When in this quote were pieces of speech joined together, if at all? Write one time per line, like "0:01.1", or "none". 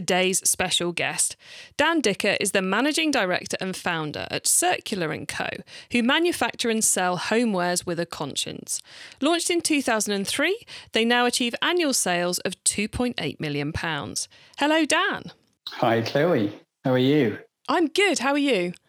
none